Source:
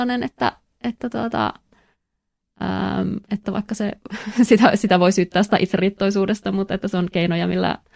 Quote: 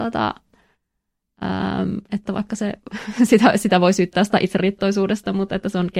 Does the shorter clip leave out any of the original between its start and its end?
no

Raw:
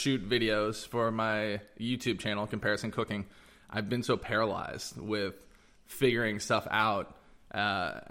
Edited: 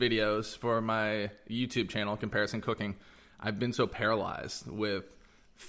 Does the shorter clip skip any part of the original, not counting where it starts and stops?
no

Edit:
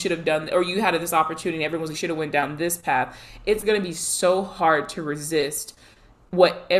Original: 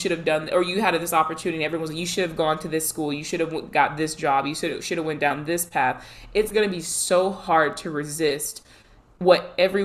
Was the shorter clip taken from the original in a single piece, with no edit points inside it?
no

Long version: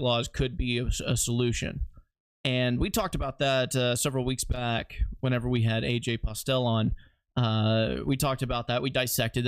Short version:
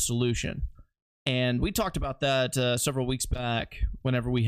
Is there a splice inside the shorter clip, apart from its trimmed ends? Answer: no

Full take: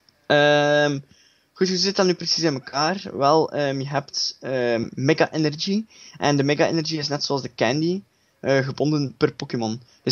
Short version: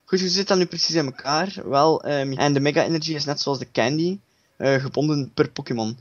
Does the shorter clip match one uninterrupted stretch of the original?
no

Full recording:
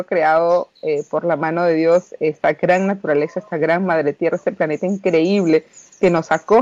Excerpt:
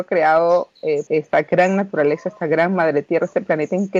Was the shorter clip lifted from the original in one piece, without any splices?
no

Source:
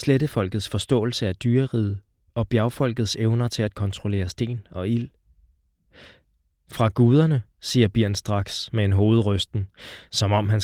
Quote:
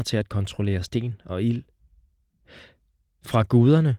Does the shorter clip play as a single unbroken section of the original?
yes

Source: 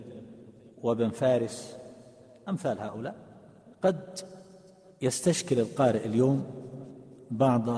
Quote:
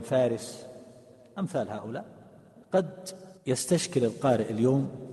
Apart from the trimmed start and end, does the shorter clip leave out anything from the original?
yes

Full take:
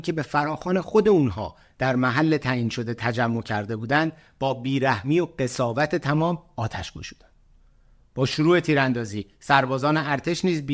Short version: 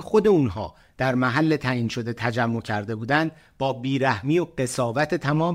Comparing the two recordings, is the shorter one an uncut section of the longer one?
yes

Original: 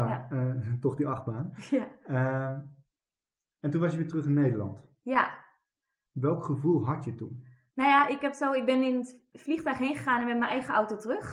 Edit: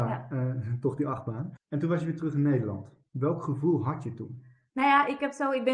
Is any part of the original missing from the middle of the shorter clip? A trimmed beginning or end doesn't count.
yes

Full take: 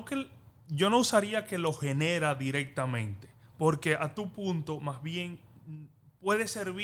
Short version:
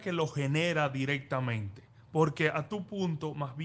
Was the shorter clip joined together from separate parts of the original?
no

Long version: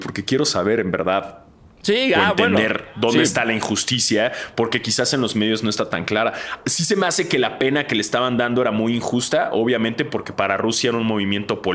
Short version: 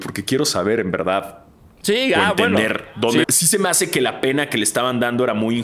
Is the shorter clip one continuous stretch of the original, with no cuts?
no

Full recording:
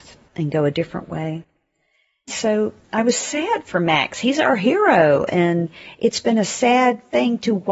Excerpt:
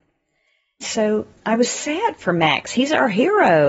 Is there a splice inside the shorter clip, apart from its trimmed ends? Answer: no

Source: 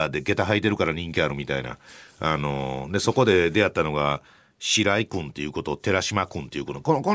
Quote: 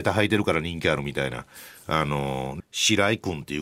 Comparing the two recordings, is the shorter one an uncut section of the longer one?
no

